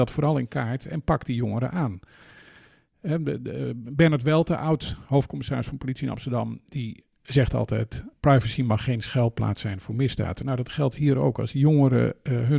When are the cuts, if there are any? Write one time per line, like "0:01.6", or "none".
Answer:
none